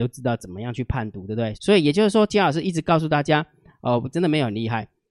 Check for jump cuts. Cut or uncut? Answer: cut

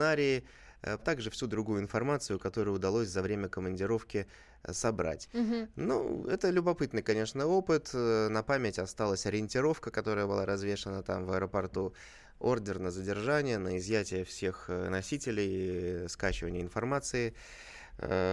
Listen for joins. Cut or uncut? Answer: cut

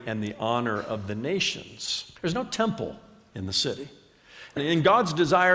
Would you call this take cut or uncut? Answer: cut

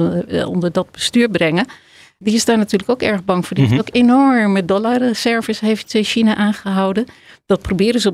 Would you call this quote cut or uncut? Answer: uncut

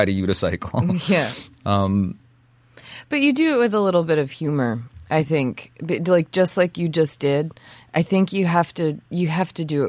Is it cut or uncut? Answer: uncut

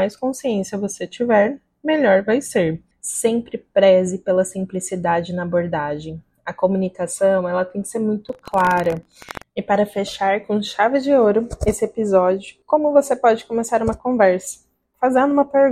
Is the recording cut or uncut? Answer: cut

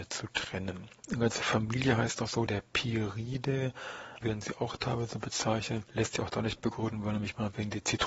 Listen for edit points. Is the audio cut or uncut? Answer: cut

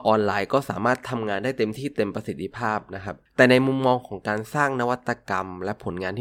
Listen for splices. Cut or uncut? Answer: uncut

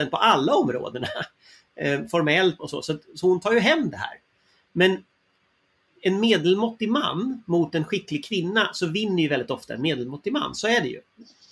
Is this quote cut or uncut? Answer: cut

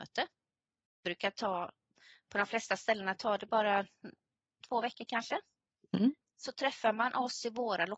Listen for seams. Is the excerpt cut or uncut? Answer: uncut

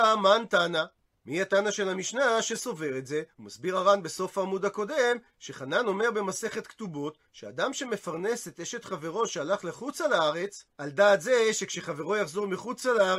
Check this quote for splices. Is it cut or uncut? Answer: cut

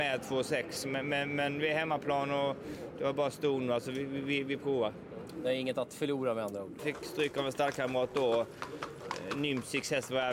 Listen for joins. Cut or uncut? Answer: cut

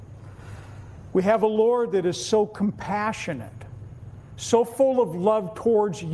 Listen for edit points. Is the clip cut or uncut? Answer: cut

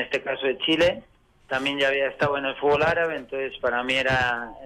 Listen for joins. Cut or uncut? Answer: uncut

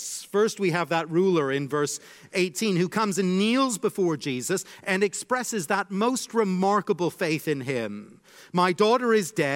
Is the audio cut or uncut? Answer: uncut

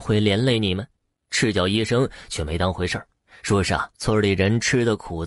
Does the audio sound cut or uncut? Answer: cut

